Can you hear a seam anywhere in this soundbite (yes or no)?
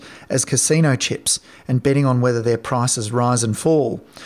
no